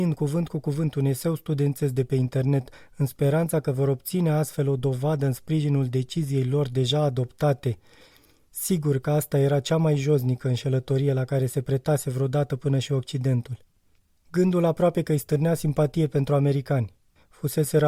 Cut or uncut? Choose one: uncut